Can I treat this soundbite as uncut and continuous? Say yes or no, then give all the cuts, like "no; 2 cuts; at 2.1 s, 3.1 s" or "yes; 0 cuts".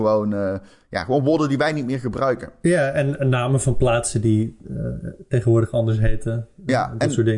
yes; 0 cuts